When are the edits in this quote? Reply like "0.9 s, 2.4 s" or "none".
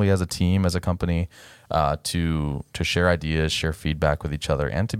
none